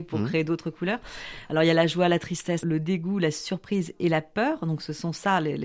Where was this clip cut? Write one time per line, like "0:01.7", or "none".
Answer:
0:02.6